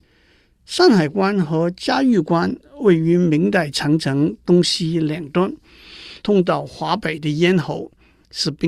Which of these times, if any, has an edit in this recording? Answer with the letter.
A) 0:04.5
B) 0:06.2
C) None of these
B